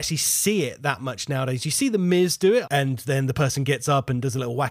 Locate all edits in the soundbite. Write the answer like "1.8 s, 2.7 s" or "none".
2.6 s